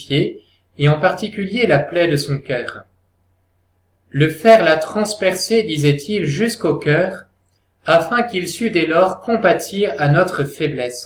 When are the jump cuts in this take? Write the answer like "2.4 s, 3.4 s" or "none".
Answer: none